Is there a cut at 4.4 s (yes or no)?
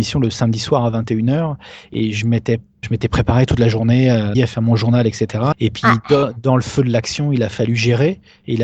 yes